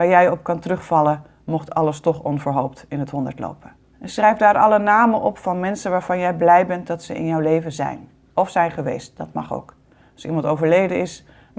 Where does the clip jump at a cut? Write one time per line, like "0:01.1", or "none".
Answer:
0:03.9